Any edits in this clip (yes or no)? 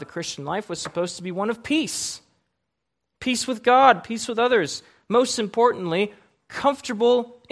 no